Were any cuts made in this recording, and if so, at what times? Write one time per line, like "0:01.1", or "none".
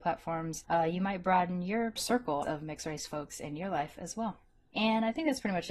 0:02.4

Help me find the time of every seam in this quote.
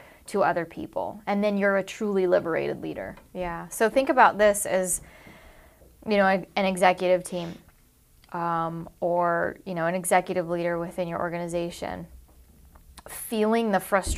0:03.3

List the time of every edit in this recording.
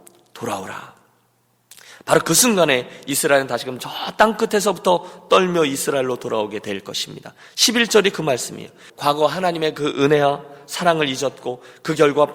0:08.9

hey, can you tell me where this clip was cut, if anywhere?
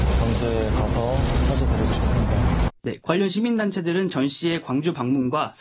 0:02.8

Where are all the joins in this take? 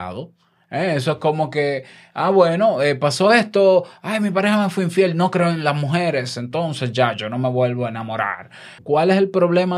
0:08.8

